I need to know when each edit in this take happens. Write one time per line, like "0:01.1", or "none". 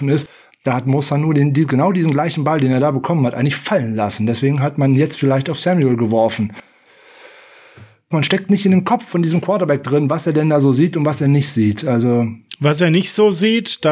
0:08.1